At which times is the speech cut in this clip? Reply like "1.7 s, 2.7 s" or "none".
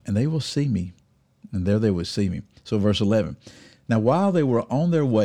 none